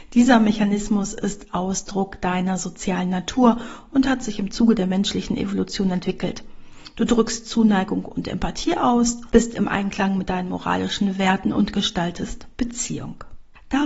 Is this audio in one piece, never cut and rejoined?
yes; 0 cuts

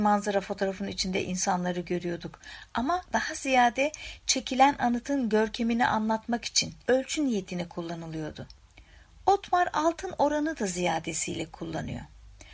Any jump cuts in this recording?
no; 0 cuts

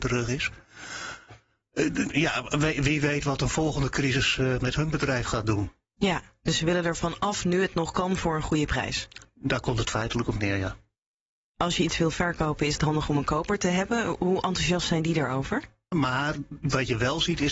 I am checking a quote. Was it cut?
yes; 1 cut; at 15.9 s

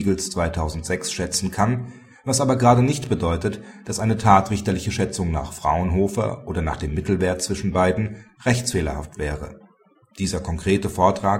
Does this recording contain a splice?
yes; 1 cut; at 10.1 s

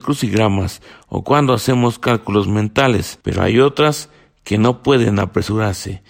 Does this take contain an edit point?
yes; 1 cut; at 3.2 s

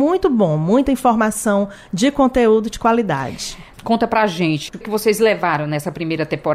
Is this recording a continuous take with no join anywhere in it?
no; 2 cuts; at 3.7 s, 4.8 s

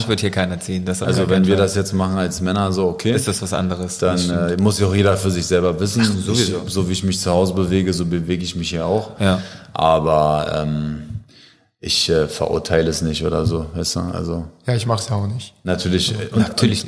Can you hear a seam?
no; 0 cuts

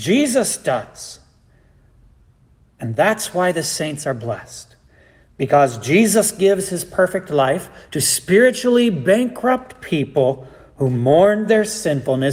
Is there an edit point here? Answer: no; 0 cuts

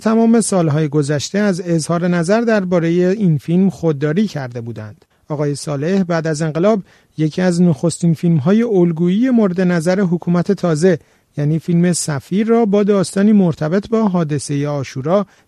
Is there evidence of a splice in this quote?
no; 0 cuts

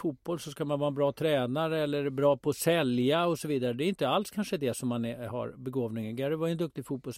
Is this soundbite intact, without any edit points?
yes; 0 cuts

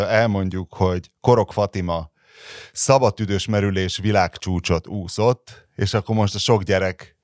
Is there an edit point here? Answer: no; 0 cuts

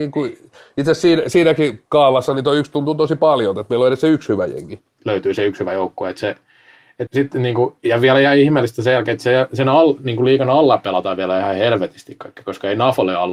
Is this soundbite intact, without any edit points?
no; 2 cuts; at 5.0 s, 7.1 s

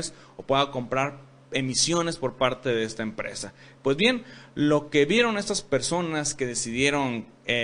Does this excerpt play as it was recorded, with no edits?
yes; 0 cuts

